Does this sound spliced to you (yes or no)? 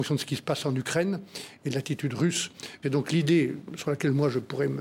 yes